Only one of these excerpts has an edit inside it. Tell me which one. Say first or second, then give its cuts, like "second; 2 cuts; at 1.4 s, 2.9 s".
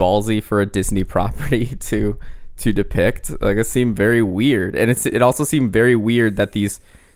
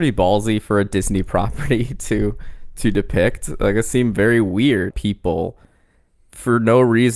second; 1 cut; at 4.9 s